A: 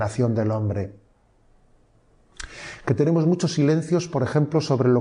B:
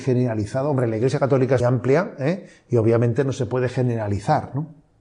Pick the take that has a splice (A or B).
B